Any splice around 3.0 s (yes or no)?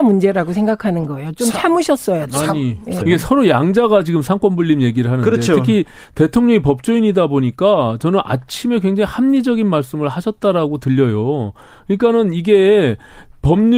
yes